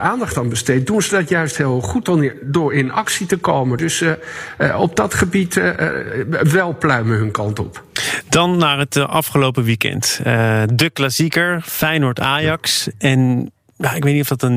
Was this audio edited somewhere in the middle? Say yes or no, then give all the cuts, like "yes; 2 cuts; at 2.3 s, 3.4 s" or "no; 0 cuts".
no; 0 cuts